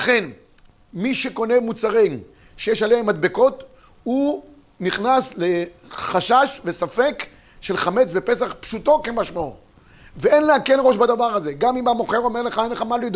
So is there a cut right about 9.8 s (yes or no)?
no